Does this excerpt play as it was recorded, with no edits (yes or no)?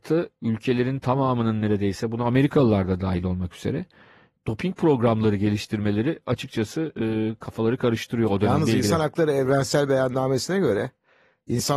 yes